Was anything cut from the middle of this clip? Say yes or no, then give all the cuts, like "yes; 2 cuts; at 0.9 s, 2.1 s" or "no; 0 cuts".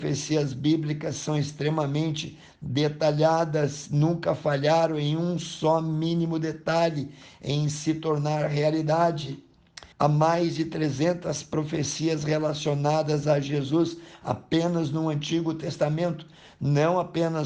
yes; 1 cut; at 9.9 s